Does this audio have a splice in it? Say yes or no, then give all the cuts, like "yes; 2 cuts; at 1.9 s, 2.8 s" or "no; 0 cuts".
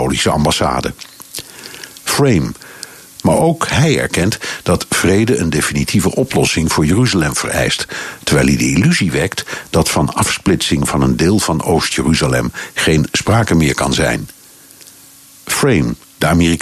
yes; 1 cut; at 3.2 s